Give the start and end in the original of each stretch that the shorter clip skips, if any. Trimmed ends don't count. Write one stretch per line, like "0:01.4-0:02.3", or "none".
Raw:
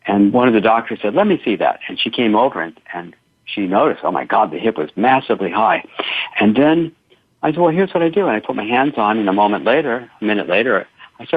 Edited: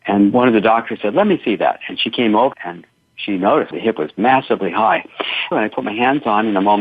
0:02.5-0:02.8
0:04.0-0:04.5
0:06.3-0:08.2